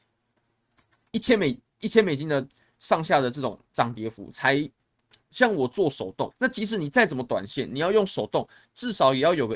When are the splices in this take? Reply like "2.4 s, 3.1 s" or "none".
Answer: 5.3 s, 6.3 s